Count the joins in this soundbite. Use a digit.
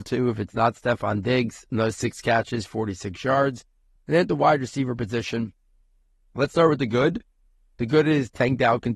0